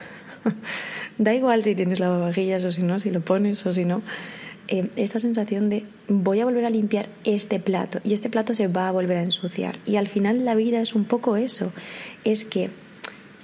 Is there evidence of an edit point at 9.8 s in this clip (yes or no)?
no